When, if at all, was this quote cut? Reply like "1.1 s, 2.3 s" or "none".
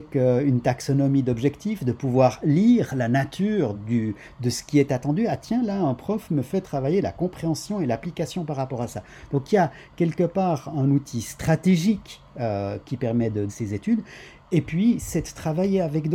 3.7 s, 13.5 s

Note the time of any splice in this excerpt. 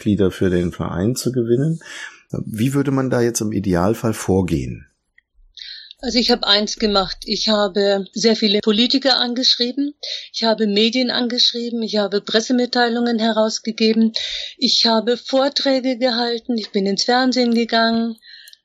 none

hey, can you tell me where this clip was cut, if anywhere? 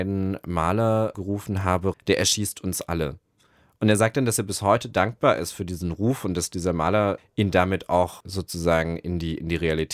1.9 s

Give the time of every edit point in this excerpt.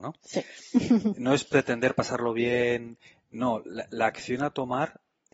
none

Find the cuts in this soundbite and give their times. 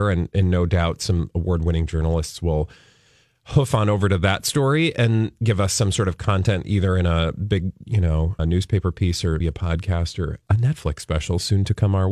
8.4 s, 9.4 s

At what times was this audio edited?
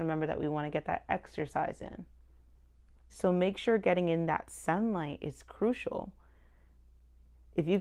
3.1 s

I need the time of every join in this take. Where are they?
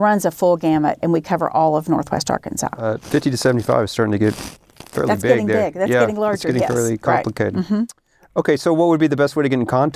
1.0 s

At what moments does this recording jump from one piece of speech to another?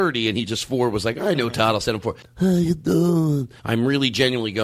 2.2 s, 3.6 s

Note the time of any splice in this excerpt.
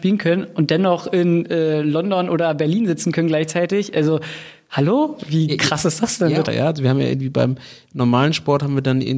6.5 s

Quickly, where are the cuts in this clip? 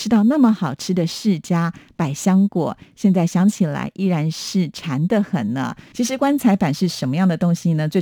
5.9 s

